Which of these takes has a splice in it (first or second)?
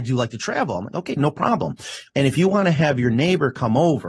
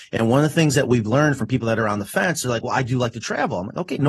first